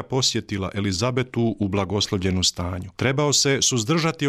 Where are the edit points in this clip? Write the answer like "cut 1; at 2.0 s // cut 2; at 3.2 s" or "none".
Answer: cut 1; at 2.9 s